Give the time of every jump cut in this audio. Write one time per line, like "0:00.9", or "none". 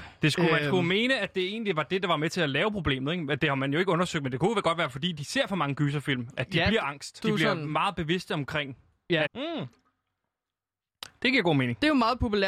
0:07.2
0:09.3